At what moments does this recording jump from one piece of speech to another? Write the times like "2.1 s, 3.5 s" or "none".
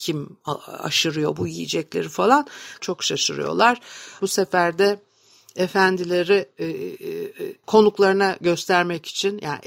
2.8 s, 4.2 s, 7.6 s